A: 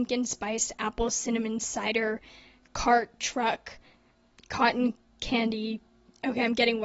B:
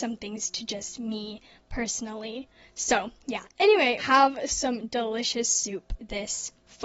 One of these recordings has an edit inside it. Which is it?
B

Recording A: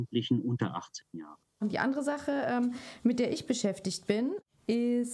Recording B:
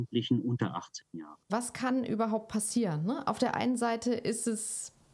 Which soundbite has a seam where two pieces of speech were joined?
B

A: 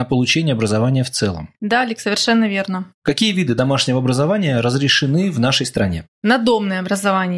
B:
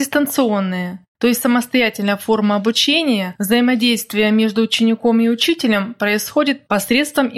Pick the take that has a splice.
A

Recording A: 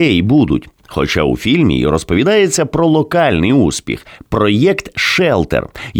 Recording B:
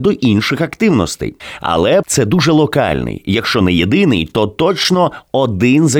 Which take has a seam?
B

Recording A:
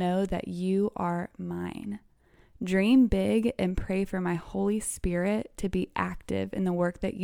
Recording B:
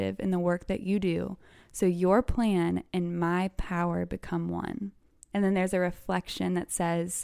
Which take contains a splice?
B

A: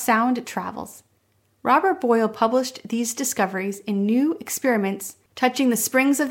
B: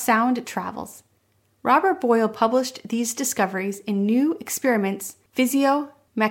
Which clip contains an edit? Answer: A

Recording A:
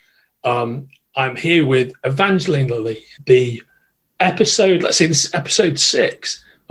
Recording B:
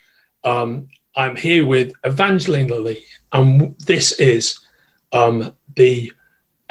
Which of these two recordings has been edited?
A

